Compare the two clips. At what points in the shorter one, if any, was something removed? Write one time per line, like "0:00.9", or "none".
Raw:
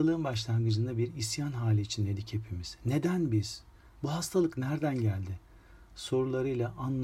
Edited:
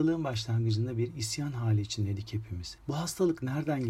0:02.8